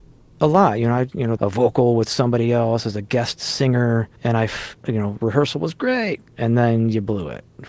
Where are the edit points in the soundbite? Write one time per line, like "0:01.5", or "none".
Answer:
0:01.4
0:04.2